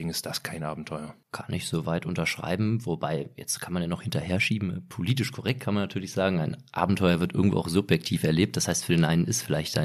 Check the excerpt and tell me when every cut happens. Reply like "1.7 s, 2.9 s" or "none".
1.2 s